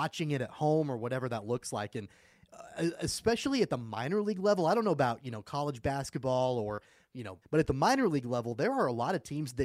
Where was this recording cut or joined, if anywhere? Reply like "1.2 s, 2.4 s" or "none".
7.4 s